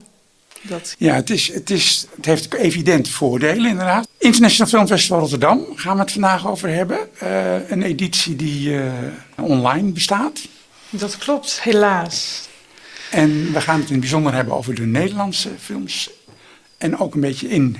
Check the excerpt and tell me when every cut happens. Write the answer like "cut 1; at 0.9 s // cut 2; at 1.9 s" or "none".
cut 1; at 0.9 s // cut 2; at 4.1 s // cut 3; at 9.4 s